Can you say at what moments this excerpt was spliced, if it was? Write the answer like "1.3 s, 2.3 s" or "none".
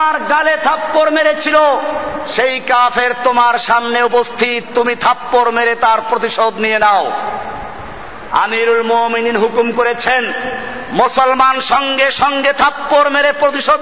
none